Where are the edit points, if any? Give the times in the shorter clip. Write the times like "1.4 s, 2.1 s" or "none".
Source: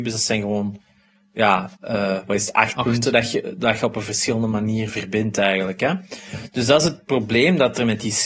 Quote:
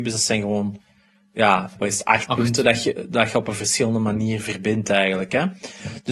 1.7 s